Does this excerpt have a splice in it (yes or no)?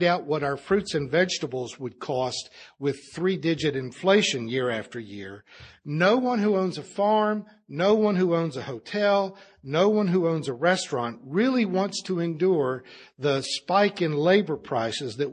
no